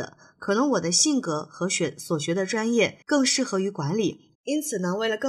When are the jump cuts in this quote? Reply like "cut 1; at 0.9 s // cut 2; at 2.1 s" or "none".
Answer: cut 1; at 3.0 s // cut 2; at 4.3 s